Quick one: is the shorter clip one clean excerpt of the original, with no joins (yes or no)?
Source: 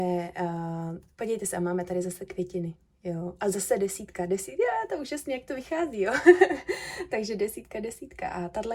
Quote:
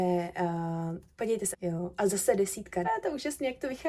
no